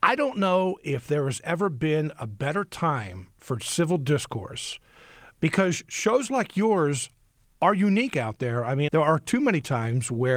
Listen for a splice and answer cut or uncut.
cut